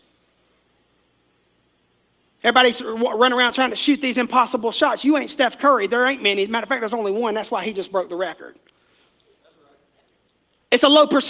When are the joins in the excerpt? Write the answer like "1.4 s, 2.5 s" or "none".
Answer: none